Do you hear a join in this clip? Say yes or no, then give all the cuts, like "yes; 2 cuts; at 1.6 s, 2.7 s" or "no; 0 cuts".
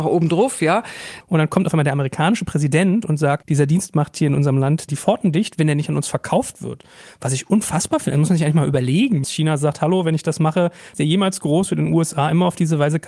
yes; 3 cuts; at 1.2 s, 9.2 s, 10.9 s